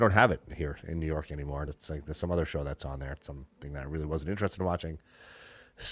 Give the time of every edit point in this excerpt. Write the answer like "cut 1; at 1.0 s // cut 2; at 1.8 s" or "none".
none